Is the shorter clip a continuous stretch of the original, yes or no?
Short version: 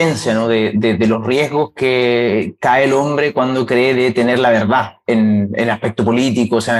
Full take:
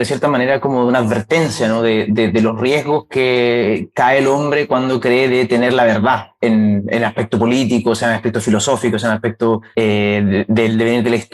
yes